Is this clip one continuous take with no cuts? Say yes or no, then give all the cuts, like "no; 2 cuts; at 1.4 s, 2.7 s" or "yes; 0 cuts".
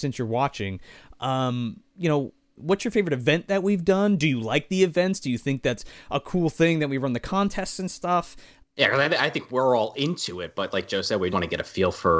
no; 3 cuts; at 2.6 s, 8.6 s, 11.3 s